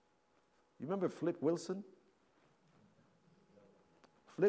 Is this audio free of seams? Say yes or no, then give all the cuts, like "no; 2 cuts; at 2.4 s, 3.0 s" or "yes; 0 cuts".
yes; 0 cuts